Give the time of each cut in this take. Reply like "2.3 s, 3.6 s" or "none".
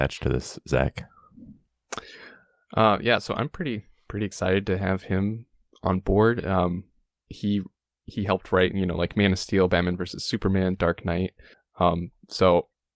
none